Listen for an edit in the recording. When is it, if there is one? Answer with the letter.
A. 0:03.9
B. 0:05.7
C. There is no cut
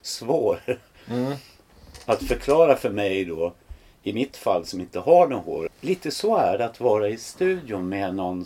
B